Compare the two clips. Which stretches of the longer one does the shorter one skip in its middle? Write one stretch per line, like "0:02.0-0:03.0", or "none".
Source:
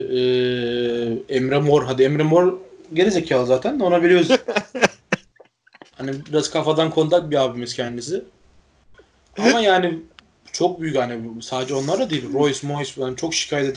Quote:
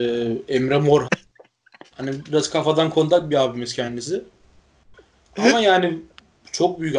0:01.9-0:05.1